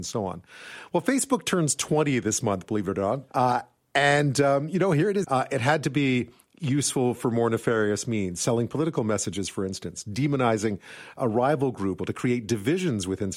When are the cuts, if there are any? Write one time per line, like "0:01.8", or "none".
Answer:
0:03.3
0:05.2
0:12.0